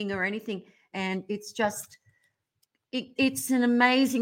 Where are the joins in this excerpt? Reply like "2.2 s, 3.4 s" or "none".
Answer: 0.9 s, 3.2 s